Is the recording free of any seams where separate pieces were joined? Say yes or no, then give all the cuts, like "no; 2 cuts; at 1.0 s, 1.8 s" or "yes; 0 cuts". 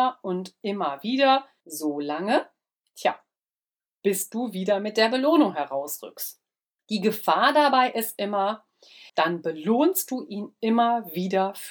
no; 2 cuts; at 6.8 s, 9.1 s